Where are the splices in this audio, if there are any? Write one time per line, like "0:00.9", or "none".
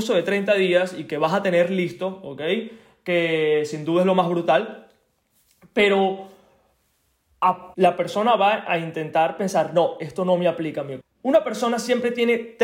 0:07.7
0:11.0